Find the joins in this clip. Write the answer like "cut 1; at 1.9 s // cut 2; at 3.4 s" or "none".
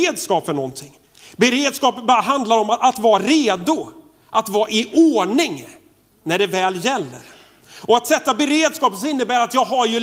none